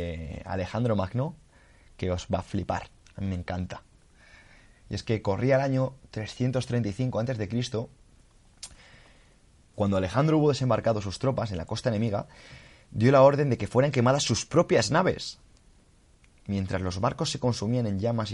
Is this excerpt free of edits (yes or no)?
no